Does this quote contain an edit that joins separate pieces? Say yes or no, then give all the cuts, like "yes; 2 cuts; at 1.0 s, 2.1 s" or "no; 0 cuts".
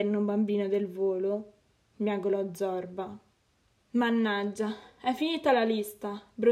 no; 0 cuts